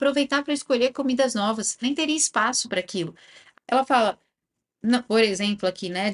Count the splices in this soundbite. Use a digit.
3